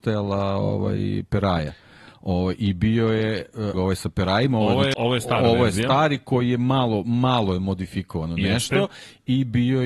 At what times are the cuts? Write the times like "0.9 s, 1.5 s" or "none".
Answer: 3.7 s, 4.9 s

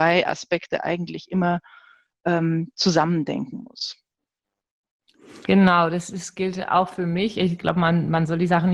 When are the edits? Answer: none

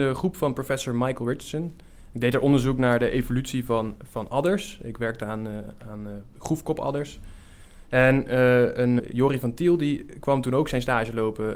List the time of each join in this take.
4.0 s, 9.0 s

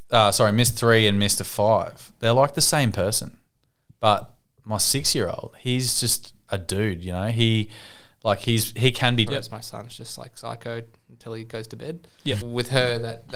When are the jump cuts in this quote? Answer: 9.3 s, 12.4 s

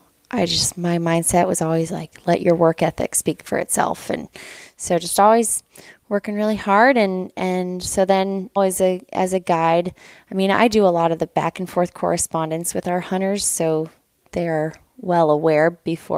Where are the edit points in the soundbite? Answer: 8.6 s

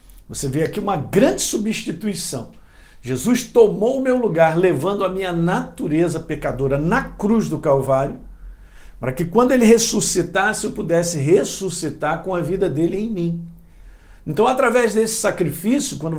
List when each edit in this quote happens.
none

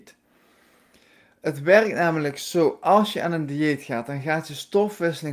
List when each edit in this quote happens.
none

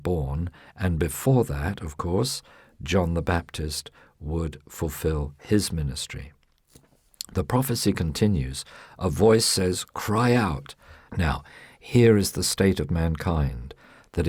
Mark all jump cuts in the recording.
11.1 s

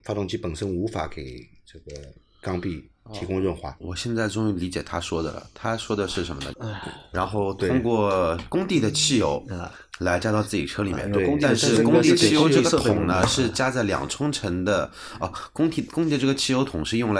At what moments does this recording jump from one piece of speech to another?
6.5 s

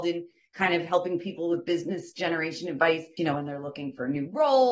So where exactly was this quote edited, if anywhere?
3.2 s

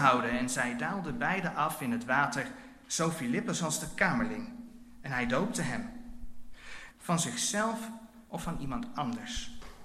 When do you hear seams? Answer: 6.9 s

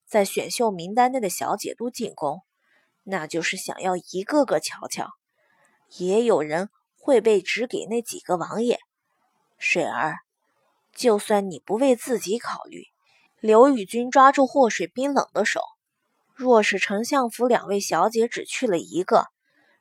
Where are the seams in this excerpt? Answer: 5.9 s, 13.3 s, 16.3 s

